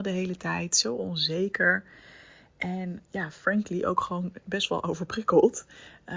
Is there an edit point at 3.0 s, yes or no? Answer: yes